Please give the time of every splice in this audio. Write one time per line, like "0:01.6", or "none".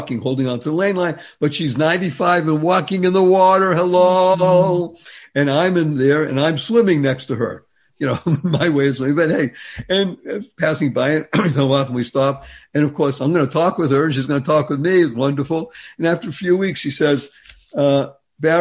none